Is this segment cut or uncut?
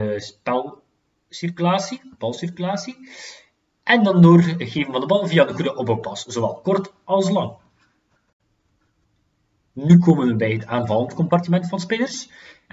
uncut